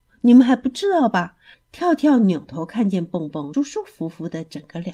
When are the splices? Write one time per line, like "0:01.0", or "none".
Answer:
0:01.5
0:03.5